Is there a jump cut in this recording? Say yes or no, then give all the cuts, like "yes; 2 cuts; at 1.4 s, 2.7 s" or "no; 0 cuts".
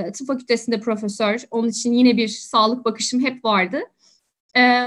no; 0 cuts